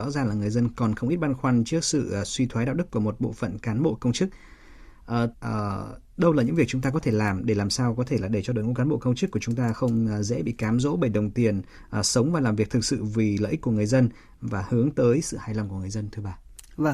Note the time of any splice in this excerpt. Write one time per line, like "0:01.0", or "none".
0:05.3